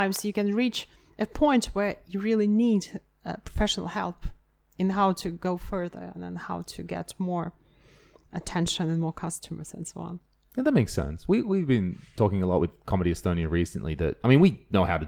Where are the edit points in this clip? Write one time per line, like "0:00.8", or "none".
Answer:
none